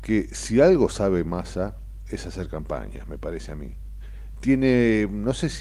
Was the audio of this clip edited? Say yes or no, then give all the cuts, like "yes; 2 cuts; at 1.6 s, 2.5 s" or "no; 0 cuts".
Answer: yes; 1 cut; at 4.3 s